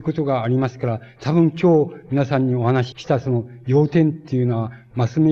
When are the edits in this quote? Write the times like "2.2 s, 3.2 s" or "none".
2.9 s